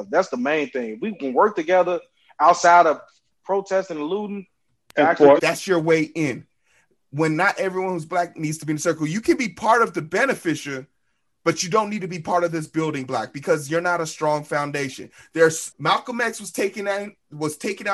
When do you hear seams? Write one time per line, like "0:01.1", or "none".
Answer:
0:05.4
0:15.7